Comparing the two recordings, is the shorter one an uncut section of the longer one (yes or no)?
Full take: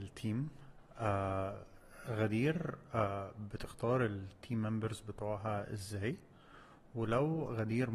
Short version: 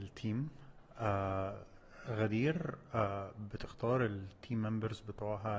yes